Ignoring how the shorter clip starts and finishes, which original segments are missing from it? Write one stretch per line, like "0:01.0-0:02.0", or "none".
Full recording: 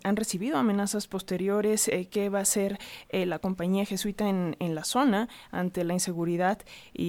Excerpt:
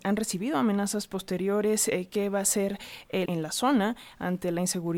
0:03.3-0:04.6

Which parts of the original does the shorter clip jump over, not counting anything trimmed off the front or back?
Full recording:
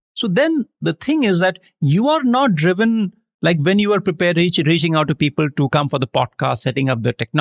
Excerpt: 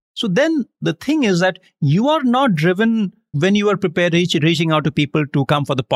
0:03.3-0:03.6

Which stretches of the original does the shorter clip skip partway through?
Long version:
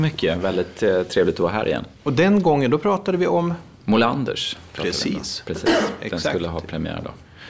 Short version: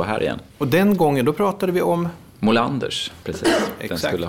0:04.7-0:05.4

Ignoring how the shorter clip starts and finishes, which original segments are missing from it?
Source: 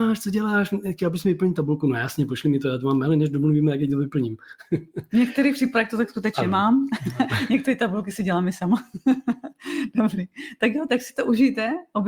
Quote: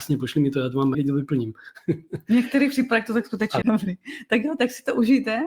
0:03.0-0:03.8
0:06.5-0:09.9

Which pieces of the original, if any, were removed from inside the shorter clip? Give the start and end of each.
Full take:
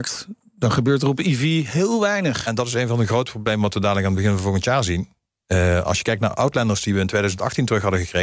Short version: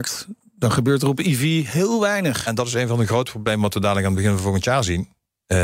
none

